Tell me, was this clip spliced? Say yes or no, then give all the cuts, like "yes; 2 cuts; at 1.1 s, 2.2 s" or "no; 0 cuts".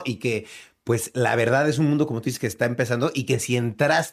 no; 0 cuts